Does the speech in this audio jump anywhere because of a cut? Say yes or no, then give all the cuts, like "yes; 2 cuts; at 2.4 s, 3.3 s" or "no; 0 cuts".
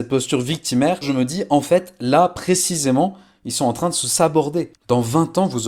yes; 2 cuts; at 1.0 s, 4.7 s